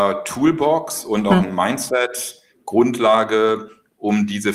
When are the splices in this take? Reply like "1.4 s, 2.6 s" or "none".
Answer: none